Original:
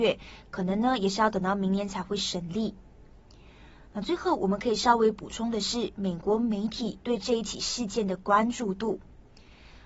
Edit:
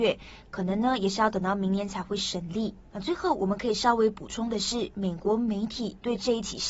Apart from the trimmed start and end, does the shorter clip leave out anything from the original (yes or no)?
yes